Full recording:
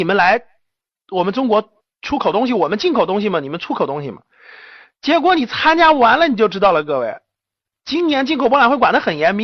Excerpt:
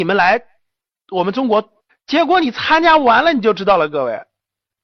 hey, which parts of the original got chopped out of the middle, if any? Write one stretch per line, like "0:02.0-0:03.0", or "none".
0:01.9-0:04.8